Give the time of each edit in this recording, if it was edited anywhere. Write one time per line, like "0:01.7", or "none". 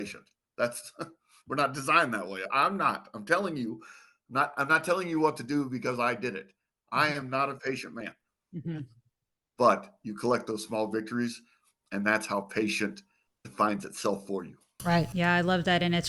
0:13.3
0:15.1

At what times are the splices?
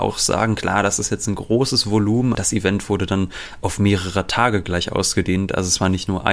0:02.3

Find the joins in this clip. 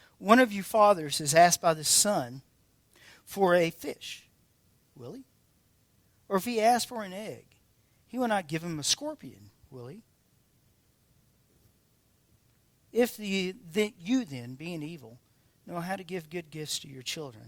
0:04.9

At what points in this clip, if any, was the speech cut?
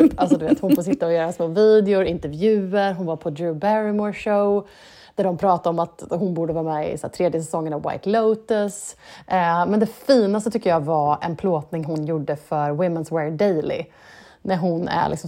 none

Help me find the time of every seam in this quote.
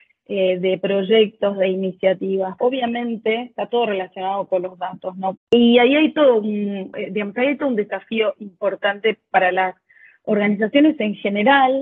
0:02.6
0:05.4
0:06.9

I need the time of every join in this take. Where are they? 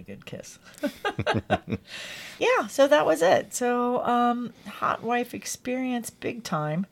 none

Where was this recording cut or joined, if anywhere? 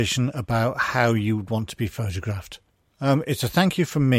0:02.8

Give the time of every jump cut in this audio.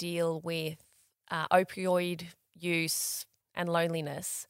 0:03.4

